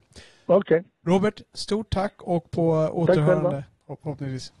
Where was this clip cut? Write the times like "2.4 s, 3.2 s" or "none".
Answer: none

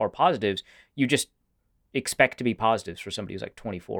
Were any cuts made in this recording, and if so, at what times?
none

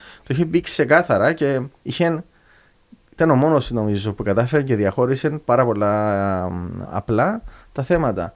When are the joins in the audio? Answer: 6.8 s

